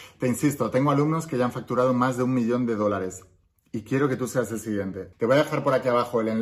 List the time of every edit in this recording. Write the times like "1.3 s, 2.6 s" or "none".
5.1 s